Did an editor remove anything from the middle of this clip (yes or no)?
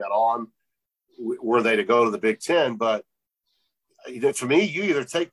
no